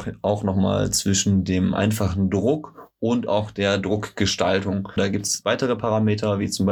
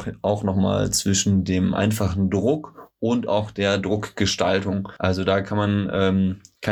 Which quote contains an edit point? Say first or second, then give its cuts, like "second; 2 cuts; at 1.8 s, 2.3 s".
first; 1 cut; at 5.0 s